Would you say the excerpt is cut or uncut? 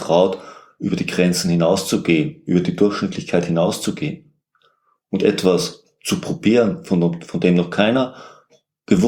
uncut